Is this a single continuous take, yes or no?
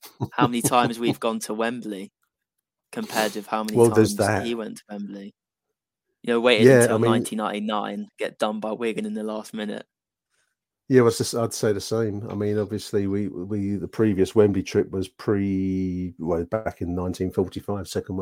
yes